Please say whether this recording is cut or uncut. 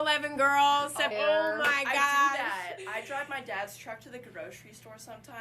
cut